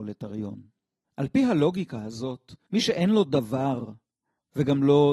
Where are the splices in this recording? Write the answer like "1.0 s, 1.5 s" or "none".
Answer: 1.0 s, 2.7 s